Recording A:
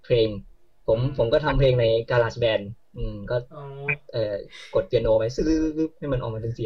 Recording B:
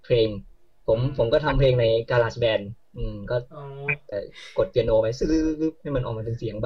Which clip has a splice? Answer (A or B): B